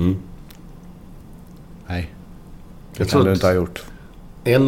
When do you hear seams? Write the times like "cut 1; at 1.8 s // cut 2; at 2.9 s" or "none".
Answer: none